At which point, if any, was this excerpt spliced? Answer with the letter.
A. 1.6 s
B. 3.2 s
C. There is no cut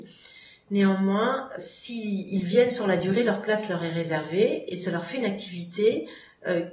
A